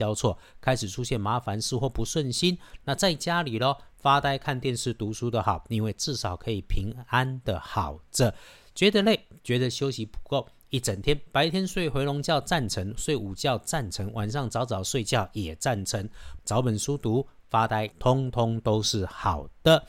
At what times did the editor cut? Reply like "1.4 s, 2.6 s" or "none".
16.4 s, 17.9 s